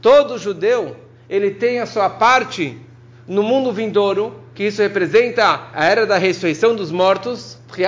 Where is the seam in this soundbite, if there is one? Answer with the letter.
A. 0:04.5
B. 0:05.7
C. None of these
B